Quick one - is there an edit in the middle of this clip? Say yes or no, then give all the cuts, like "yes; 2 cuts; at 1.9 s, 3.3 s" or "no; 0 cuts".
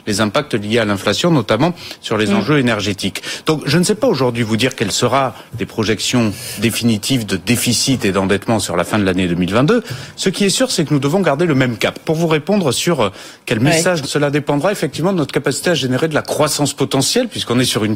yes; 2 cuts; at 12.0 s, 14.0 s